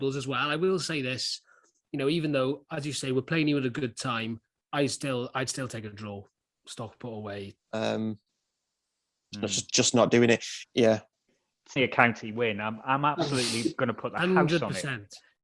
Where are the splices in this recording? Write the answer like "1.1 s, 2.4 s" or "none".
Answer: 7.6 s, 10.6 s, 11.8 s